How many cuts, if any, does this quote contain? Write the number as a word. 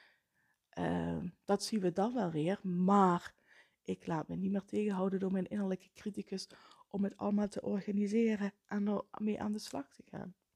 one